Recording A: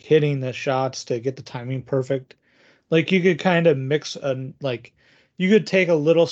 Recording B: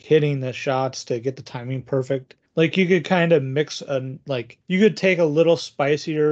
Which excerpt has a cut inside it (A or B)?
B